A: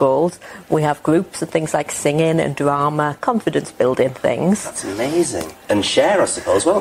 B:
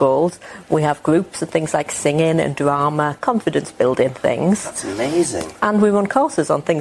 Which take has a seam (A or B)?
A